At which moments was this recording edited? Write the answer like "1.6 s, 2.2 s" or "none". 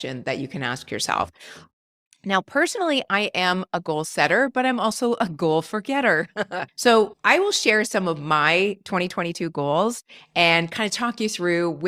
6.7 s